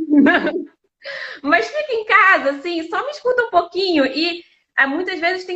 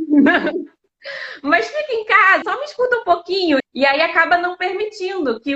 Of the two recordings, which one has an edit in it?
second; 2 cuts; at 2.4 s, 3.6 s

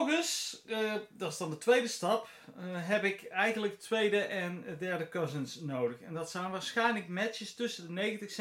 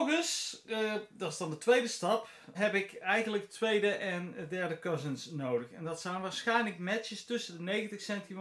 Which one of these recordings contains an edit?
second; 1 cut; at 2.5 s

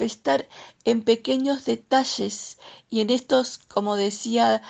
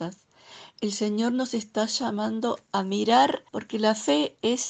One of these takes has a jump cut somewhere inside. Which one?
second; 1 cut; at 3.5 s

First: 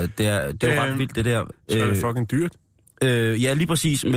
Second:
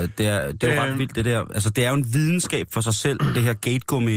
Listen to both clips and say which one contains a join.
first; 1 cut; at 1.5 s

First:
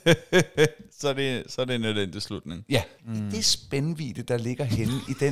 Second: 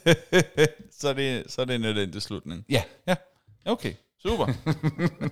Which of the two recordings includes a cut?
first; 1 cut; at 3.0 s

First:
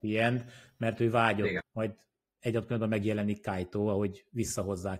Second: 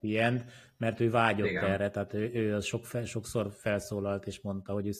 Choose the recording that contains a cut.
first; 1 cut; at 1.6 s

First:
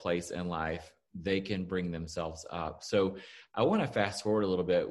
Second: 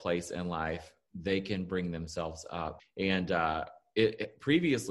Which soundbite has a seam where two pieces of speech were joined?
second; 1 cut; at 2.8 s

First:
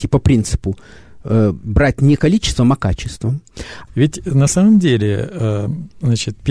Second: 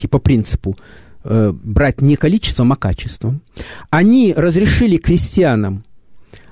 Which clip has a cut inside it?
first; 1 cut; at 3.9 s

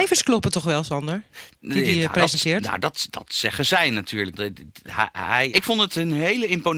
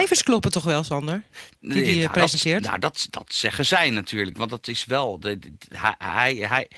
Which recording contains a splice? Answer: first; 2 cuts; at 4.3 s, 5.5 s

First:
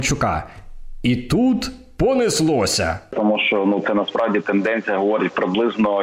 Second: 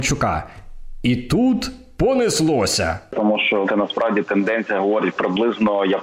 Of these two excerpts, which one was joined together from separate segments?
second; 1 cut; at 3.6 s

